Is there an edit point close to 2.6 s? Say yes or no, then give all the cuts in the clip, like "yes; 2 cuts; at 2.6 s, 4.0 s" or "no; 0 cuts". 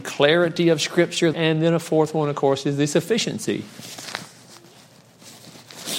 no; 1 cut; at 1.3 s